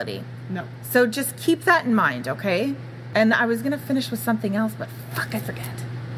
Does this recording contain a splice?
no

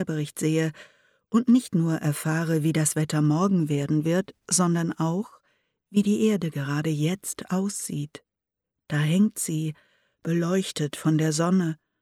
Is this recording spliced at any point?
no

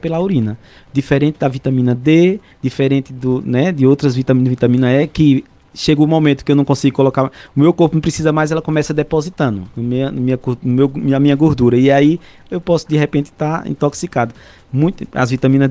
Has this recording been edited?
yes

